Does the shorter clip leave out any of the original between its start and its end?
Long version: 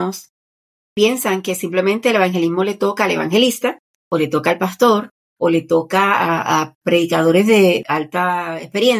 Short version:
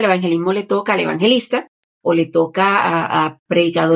yes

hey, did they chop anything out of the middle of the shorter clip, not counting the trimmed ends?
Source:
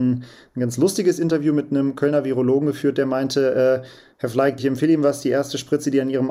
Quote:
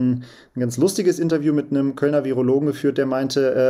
no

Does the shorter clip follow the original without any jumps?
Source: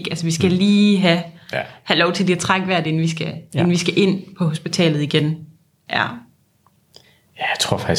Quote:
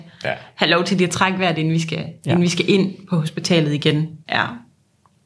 no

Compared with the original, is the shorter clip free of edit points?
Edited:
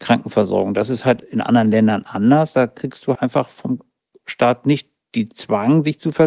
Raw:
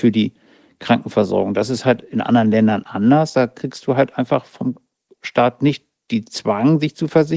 no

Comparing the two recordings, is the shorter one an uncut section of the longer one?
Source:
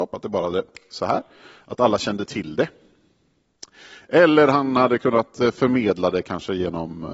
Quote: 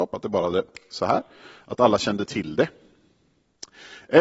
yes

